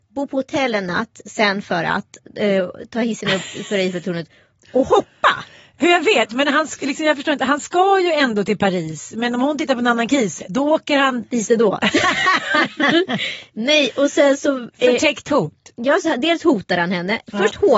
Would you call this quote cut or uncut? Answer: uncut